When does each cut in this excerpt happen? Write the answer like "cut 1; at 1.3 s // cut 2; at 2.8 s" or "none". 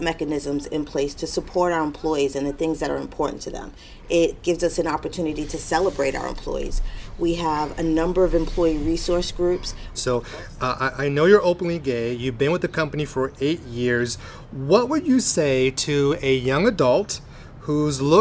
cut 1; at 9.9 s